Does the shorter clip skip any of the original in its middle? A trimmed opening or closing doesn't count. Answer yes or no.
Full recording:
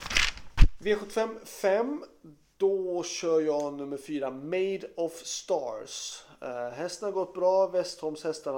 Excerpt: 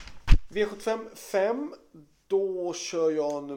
no